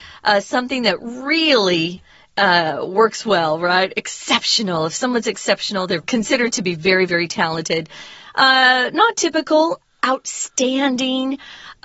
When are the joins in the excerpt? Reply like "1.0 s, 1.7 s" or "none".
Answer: 6.0 s, 7.1 s